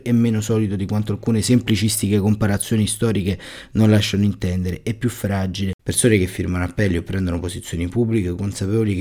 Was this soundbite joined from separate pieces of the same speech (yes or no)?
yes